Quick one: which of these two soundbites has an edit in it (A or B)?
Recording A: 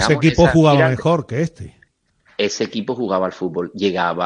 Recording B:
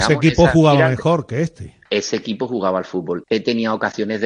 B